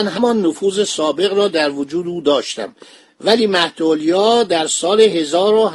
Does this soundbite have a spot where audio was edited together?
no; 0 cuts

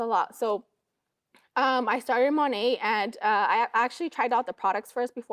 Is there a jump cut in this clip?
no; 0 cuts

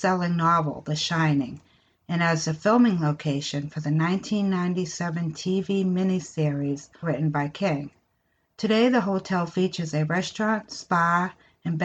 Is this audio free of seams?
no; 1 cut; at 7.0 s

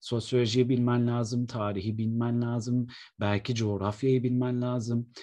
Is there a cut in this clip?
no; 0 cuts

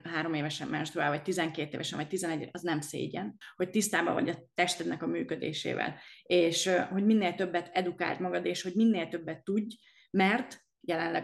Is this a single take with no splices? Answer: yes; 0 cuts

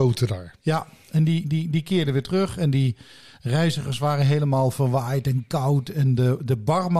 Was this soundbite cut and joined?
no; 0 cuts

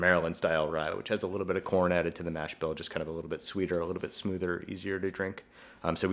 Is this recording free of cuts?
yes; 0 cuts

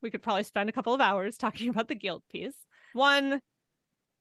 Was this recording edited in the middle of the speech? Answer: yes; 1 cut; at 2.9 s

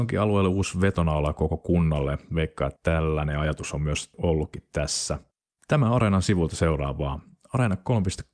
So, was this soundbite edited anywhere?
no; 0 cuts

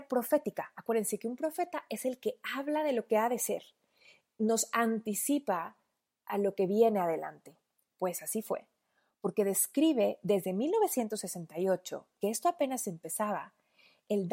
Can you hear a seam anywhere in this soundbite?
no; 0 cuts

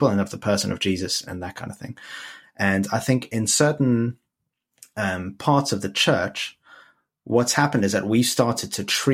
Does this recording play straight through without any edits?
no; 1 cut; at 1.3 s

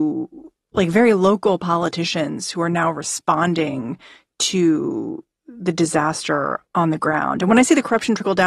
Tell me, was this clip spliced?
yes; 1 cut; at 6.7 s

